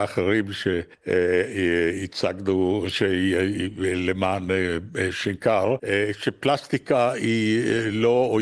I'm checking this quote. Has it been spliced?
no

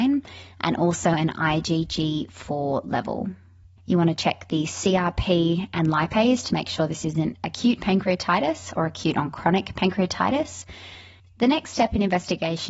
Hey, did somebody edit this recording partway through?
yes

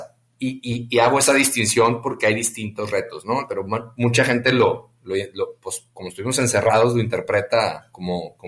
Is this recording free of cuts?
no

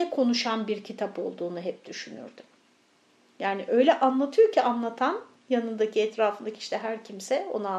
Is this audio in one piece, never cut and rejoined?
yes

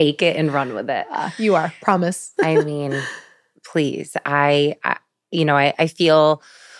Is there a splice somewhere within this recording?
yes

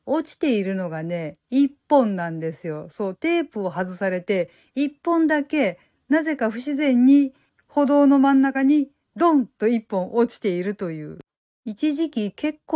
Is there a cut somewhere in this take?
no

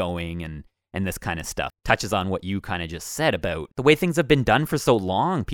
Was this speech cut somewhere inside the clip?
yes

